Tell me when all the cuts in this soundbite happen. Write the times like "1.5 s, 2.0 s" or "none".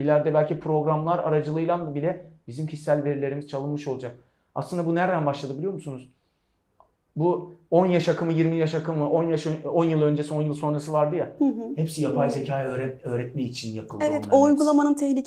none